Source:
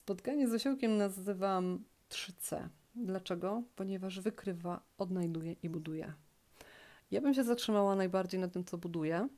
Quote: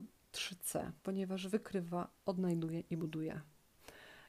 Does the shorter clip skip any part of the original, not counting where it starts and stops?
yes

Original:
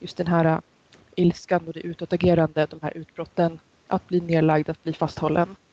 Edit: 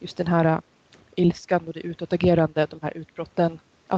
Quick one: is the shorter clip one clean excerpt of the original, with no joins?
yes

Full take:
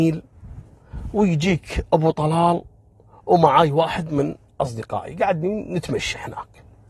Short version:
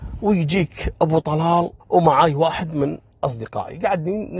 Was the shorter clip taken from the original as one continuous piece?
no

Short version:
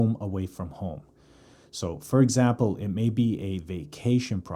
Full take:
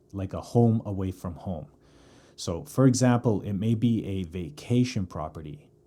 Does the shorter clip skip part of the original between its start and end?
no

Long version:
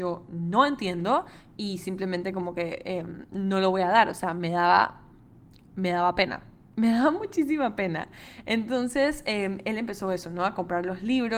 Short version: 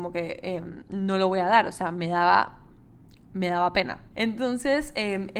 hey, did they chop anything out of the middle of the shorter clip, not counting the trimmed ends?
yes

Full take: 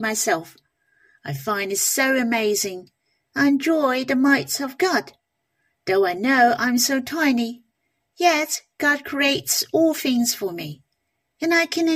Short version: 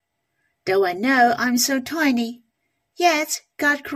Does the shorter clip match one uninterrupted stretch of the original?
yes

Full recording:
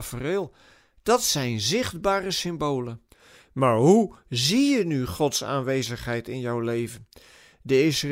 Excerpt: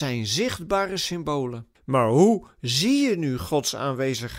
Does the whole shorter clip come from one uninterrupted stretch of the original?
no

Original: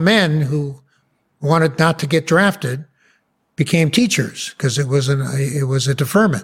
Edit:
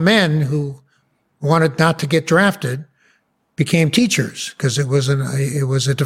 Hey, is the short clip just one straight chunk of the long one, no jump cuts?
yes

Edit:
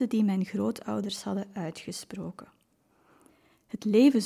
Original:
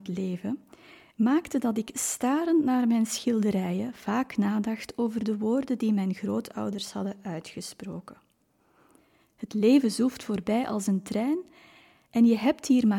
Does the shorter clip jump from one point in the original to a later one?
no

